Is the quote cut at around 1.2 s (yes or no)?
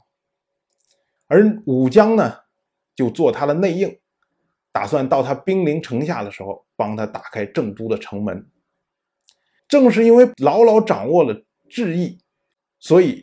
yes